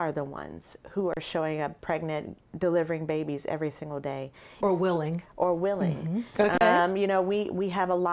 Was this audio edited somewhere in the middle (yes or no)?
yes